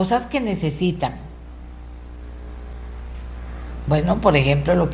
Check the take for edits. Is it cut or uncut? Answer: uncut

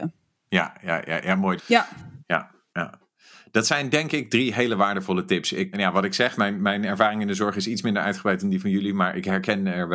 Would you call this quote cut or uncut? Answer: cut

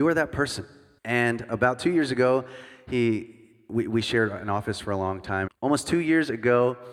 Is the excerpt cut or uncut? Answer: cut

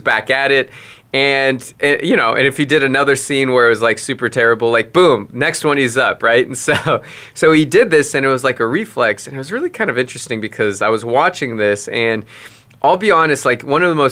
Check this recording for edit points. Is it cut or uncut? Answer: uncut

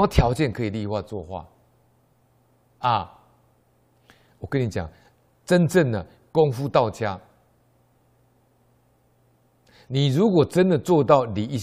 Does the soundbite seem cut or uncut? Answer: uncut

